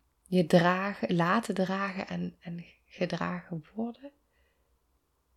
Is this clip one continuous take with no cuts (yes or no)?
yes